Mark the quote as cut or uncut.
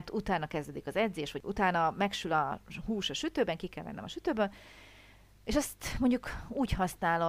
uncut